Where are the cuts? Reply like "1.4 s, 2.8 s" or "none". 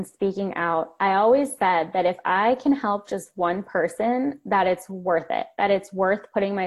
none